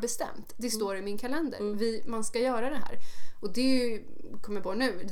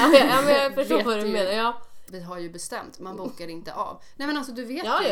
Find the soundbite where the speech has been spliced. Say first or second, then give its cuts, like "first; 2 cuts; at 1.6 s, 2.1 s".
second; 1 cut; at 2.1 s